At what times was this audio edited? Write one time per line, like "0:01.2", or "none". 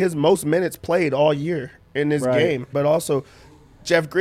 0:02.7